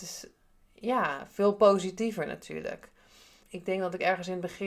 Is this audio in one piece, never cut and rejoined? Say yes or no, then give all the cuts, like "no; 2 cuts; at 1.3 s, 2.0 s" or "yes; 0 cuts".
no; 1 cut; at 3.4 s